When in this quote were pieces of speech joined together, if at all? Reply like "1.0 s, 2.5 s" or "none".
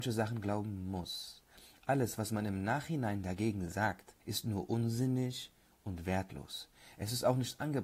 4.2 s